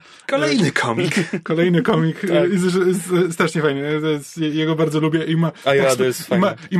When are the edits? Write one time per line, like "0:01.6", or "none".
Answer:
none